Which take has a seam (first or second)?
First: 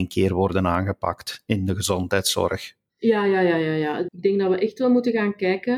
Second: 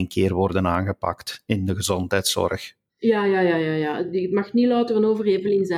first